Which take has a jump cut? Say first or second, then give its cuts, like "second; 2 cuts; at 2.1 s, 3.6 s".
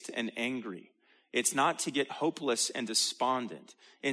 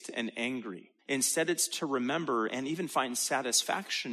second; 1 cut; at 1.0 s